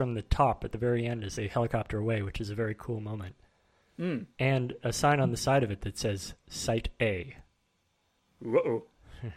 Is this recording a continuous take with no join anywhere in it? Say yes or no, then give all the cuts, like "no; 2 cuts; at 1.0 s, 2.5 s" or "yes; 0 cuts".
yes; 0 cuts